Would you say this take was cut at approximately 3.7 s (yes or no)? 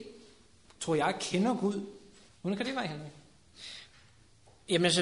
no